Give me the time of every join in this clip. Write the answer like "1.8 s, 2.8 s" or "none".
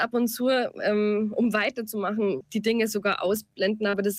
2.4 s

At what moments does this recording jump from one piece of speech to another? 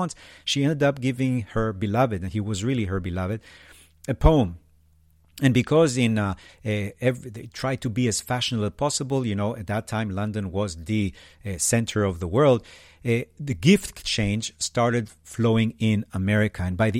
6.5 s

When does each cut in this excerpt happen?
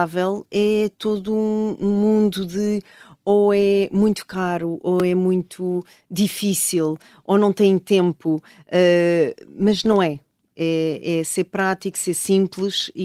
none

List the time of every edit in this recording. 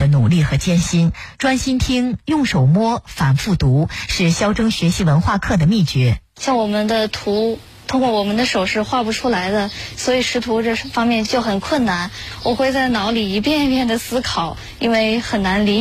none

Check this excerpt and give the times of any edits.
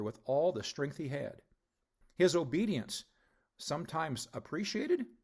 2.0 s

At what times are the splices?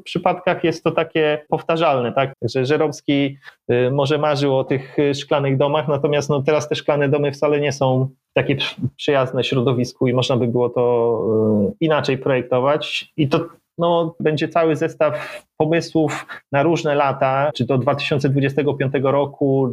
2.3 s, 14.2 s

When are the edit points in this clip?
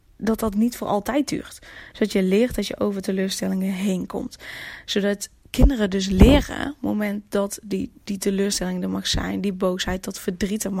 1.9 s

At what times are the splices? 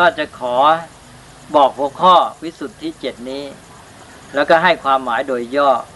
none

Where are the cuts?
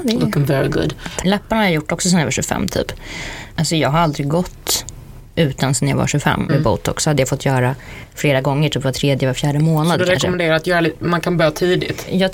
1.2 s, 3.6 s, 6.5 s

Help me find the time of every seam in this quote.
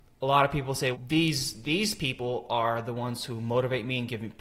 0.9 s

